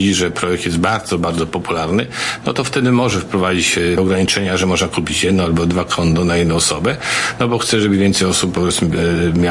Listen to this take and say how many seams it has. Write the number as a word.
zero